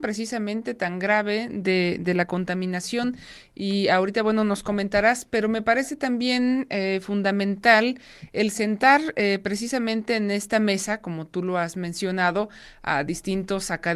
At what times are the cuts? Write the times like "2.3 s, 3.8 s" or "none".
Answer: none